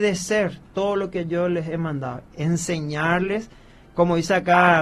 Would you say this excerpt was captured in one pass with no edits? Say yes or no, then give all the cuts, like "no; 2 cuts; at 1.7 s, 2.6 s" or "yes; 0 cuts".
no; 1 cut; at 2.2 s